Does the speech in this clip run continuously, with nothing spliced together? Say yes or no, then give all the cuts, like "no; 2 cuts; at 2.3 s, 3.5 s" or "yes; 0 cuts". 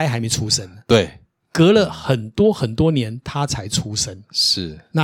yes; 0 cuts